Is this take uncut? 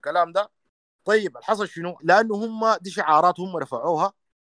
no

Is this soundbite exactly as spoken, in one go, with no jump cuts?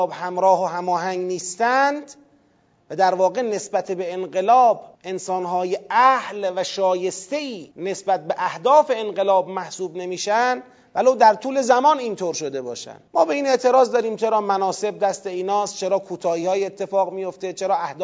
no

